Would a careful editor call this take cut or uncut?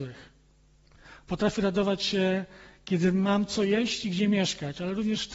uncut